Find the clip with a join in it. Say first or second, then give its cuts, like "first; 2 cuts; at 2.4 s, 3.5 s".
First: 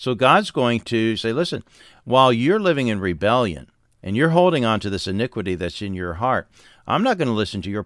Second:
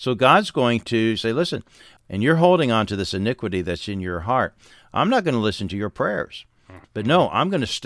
second; 2 cuts; at 2.0 s, 6.8 s